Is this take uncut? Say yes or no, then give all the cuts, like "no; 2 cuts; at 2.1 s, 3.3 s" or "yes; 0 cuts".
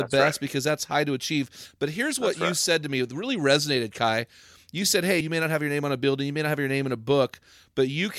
no; 1 cut; at 5.2 s